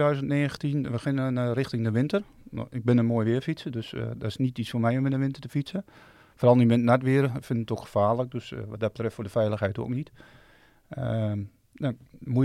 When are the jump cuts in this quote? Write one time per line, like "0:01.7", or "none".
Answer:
none